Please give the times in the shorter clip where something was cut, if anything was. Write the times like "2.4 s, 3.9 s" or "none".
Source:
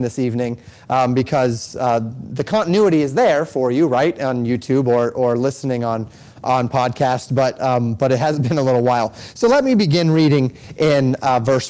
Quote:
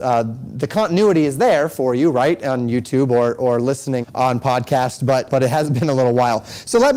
4.0 s, 5.3 s